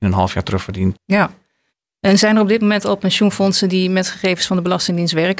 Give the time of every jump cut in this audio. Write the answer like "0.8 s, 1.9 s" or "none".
1.0 s